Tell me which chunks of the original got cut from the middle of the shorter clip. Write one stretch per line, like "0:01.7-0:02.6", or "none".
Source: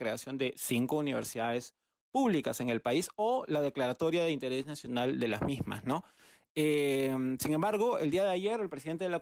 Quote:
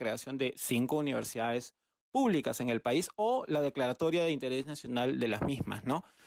none